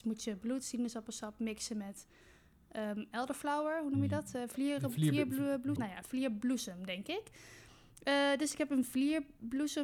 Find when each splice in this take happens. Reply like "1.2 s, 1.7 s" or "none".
5.8 s